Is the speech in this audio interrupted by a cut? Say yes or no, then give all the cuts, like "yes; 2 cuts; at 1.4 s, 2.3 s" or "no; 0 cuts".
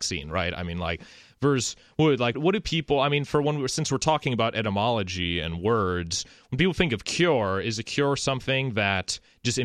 yes; 1 cut; at 2.3 s